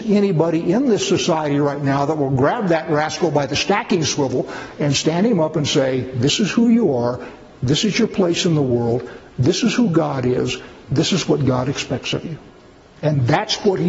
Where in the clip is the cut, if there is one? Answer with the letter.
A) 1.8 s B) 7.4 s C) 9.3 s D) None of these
D